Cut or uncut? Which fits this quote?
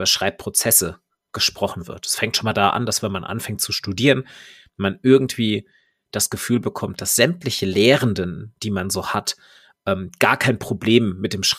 uncut